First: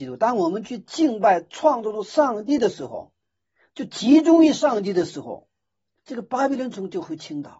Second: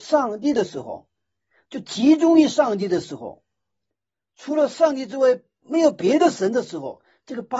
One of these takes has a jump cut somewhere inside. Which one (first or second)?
first